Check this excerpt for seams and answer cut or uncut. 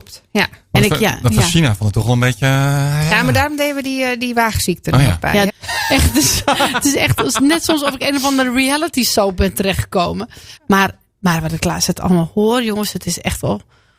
cut